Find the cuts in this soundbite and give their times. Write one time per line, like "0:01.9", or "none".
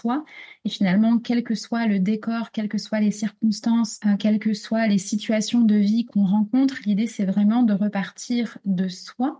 none